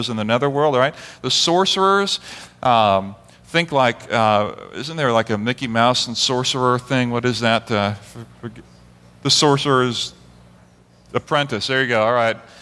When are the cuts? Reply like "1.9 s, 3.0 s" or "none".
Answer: none